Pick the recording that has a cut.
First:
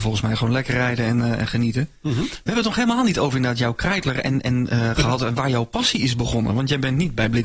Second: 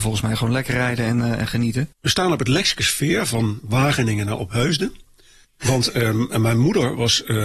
second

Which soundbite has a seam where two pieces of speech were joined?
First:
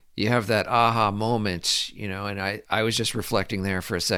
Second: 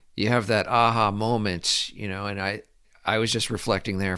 first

